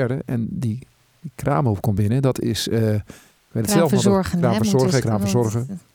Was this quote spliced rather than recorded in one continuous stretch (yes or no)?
yes